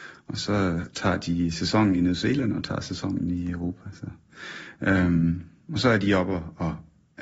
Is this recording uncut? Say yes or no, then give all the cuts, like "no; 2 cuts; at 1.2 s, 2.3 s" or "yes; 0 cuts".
yes; 0 cuts